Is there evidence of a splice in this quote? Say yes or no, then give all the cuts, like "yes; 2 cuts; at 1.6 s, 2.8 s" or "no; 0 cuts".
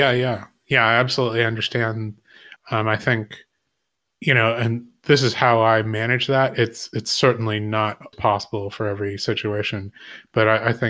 yes; 2 cuts; at 2.6 s, 8.1 s